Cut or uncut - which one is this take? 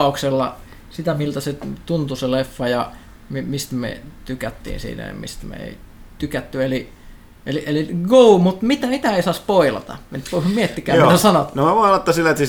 uncut